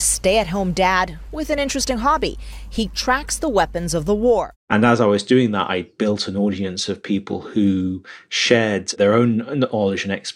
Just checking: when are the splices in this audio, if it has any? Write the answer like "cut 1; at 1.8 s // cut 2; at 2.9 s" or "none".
cut 1; at 4.6 s